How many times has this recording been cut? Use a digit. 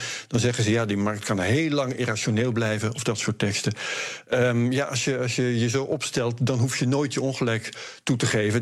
0